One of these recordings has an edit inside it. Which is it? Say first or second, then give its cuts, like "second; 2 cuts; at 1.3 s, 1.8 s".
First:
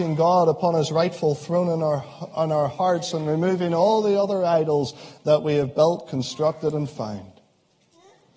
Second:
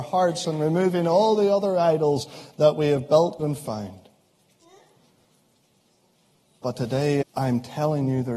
second; 2 cuts; at 3.4 s, 7.2 s